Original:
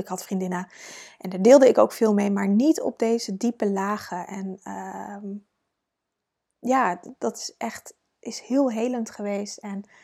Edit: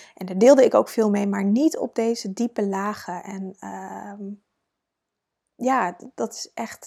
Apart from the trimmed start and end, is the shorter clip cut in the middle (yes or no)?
no